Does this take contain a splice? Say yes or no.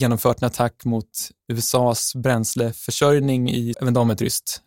yes